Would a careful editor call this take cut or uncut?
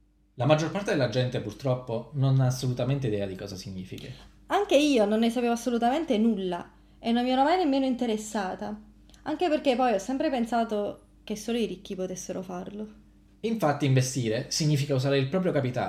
cut